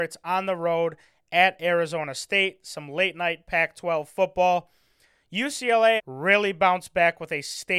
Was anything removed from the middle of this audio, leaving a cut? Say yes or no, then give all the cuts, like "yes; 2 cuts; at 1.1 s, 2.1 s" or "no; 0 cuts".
yes; 1 cut; at 6.0 s